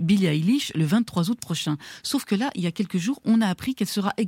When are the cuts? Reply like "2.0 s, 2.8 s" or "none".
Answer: none